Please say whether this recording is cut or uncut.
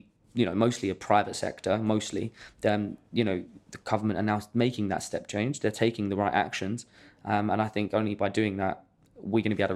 uncut